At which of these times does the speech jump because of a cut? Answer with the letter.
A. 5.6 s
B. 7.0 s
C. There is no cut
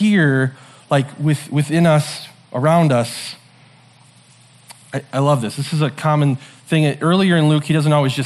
C